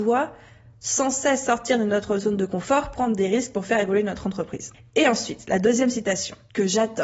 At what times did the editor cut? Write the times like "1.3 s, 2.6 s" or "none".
none